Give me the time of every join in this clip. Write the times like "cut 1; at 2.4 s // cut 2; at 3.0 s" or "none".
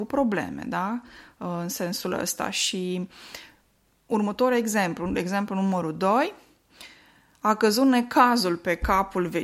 none